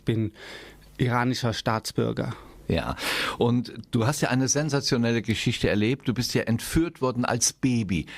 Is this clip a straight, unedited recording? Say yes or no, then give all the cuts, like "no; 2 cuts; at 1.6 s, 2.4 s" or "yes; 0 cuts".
yes; 0 cuts